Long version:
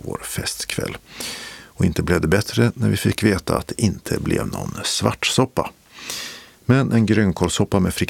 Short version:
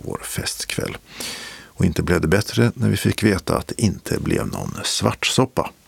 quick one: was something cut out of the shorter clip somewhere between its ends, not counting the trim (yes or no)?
no